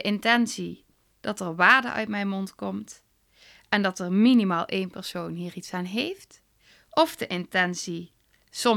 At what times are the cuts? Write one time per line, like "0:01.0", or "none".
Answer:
none